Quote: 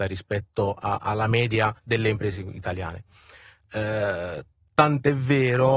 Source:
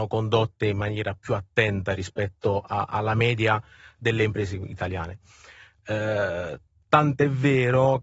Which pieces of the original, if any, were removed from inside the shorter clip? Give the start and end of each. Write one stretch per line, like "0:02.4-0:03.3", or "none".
0:03.7-0:03.9